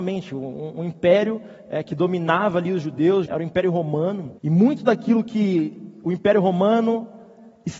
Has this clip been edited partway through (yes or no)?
yes